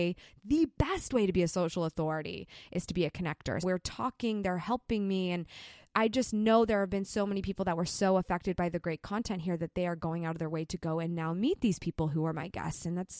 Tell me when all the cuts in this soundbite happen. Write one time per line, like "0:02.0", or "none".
0:03.6